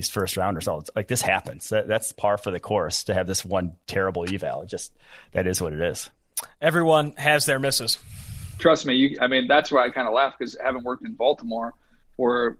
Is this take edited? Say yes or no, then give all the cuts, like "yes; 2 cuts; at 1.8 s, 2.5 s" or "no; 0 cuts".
yes; 1 cut; at 9.2 s